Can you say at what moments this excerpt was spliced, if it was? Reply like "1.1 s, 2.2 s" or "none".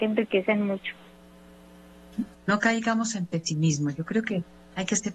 2.3 s

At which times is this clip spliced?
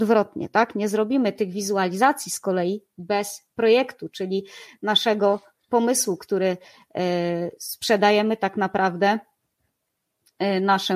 none

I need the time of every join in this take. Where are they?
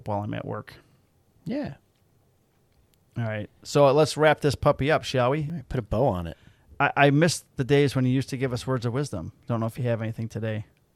none

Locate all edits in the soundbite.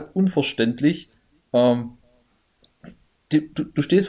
none

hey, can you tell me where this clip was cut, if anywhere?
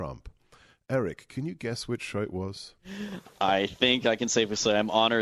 none

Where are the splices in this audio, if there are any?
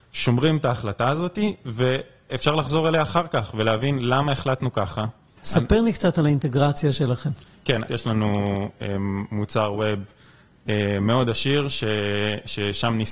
5.4 s, 7.9 s

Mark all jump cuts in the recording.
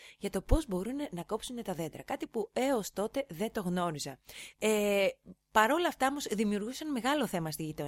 4.5 s

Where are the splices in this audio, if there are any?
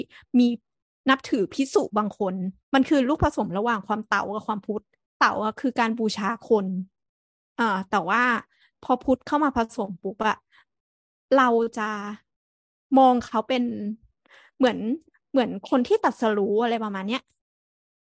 2.6 s

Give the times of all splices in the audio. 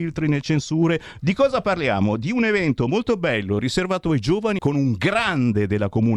1.2 s, 4.6 s

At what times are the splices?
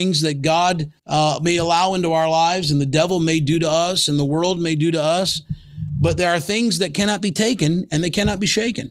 1.0 s

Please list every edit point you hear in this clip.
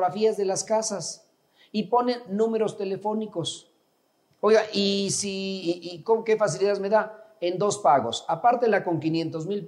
4.3 s

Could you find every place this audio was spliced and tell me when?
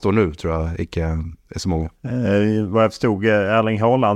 1.9 s

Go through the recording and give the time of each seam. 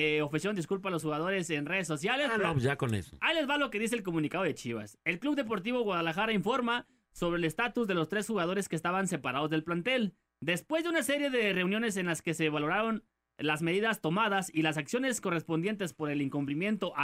none

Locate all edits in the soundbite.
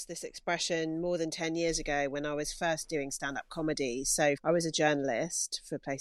4.4 s

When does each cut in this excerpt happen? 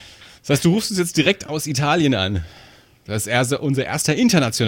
3.1 s

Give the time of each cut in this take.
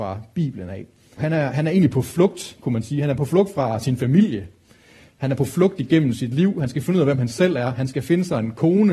1.2 s

